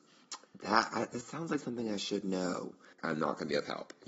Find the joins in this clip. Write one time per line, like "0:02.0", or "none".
0:03.0